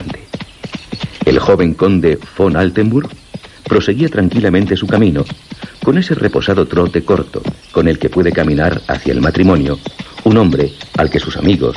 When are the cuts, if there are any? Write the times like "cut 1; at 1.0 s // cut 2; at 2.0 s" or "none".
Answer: none